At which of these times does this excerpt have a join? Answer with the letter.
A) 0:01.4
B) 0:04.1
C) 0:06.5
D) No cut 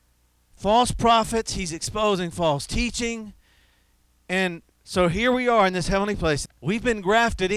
C